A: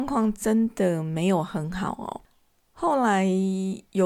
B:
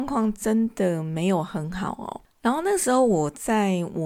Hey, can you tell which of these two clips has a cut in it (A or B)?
B